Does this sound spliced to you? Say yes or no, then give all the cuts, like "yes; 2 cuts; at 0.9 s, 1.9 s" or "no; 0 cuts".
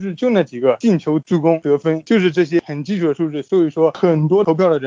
no; 0 cuts